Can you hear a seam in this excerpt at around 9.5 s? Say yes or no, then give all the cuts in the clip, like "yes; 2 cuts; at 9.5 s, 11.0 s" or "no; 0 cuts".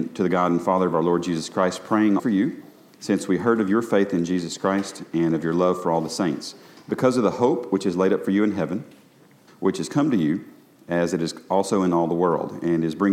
yes; 2 cuts; at 2.2 s, 9.5 s